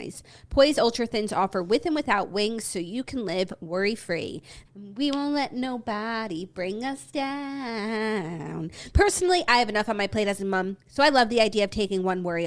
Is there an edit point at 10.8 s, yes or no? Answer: no